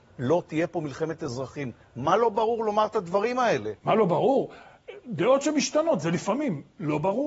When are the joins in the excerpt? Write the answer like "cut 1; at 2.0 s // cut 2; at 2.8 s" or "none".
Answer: none